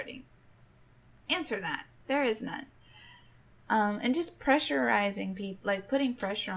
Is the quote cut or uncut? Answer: uncut